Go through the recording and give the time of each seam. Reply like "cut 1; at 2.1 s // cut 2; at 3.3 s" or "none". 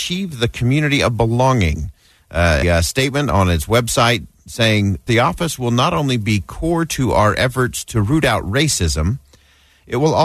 cut 1; at 2.6 s // cut 2; at 5.1 s